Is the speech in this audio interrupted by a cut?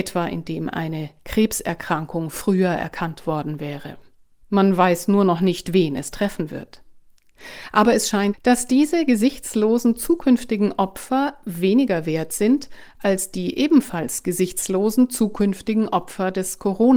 yes; 2 cuts; at 4.4 s, 8.3 s

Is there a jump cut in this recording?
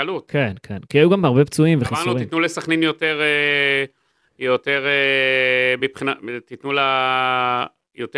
no; 0 cuts

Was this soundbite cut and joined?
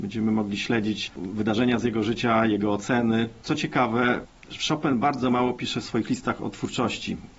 no; 0 cuts

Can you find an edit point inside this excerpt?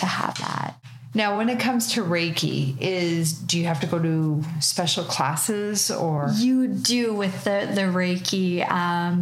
no; 0 cuts

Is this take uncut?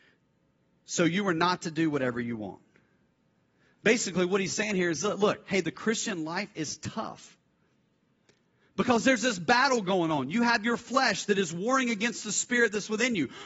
yes; 0 cuts

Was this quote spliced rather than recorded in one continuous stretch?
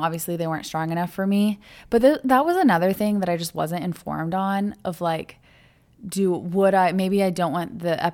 no; 0 cuts

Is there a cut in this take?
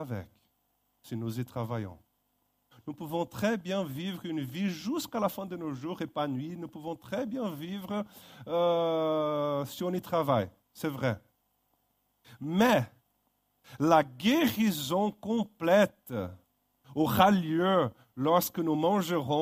yes; 1 cut; at 2.7 s

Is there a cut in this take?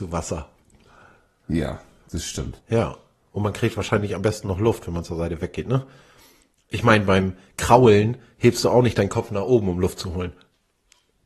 yes; 1 cut; at 2.6 s

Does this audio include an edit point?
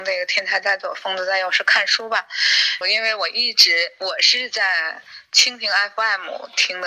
yes; 1 cut; at 2.8 s

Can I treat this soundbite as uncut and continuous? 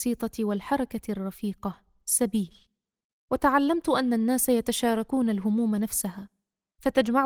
yes; 0 cuts

